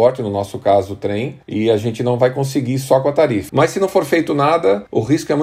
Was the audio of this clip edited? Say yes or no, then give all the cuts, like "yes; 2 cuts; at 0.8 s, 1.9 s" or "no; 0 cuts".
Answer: yes; 1 cut; at 3.5 s